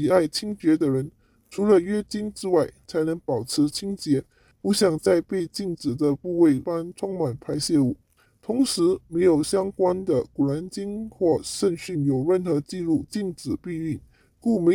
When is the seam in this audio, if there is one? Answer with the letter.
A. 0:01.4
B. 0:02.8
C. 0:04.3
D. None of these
B